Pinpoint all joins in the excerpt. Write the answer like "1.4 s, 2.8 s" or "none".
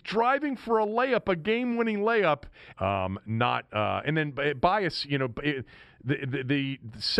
2.7 s

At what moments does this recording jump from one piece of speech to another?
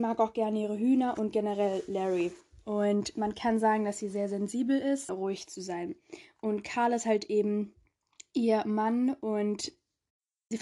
5.1 s

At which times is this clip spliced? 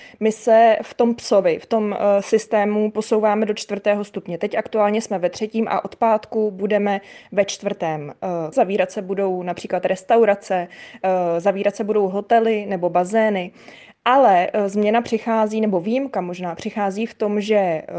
8.5 s

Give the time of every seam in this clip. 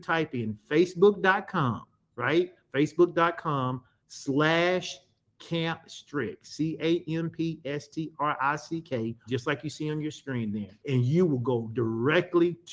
9.3 s, 10.8 s

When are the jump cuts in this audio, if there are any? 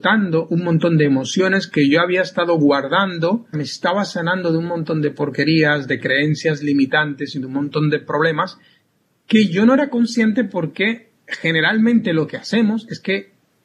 3.5 s

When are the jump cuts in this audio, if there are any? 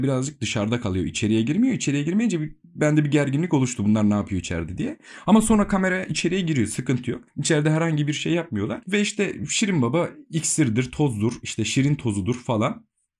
none

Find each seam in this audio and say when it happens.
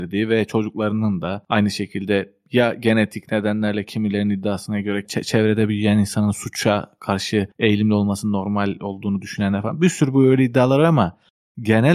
5.0 s, 7.5 s

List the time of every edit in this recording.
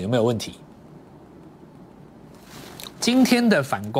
2.9 s

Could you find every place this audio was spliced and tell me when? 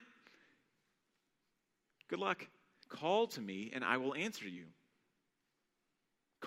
2.8 s

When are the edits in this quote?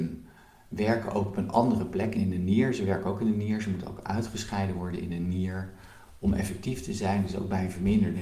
2.1 s

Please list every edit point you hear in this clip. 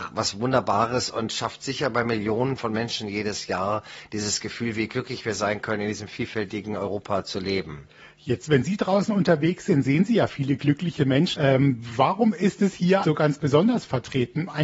11.4 s, 13.0 s

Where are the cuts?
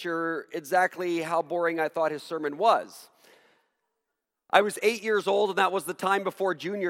none

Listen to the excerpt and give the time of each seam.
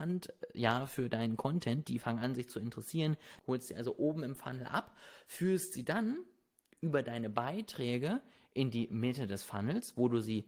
3.4 s

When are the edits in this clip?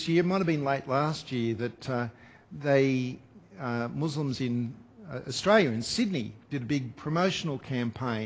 6.5 s

